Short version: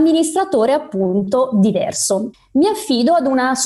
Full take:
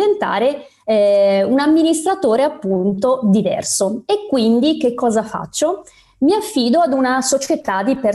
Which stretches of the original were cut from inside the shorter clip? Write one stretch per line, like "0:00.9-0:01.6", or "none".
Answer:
0:04.0-0:06.0